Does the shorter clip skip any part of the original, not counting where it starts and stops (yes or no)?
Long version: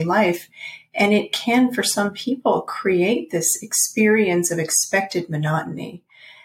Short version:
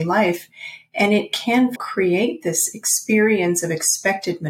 yes